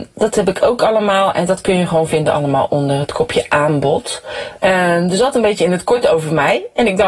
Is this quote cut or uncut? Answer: cut